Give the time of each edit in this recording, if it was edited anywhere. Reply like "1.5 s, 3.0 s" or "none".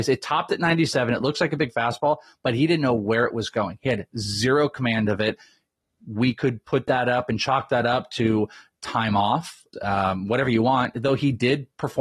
9.7 s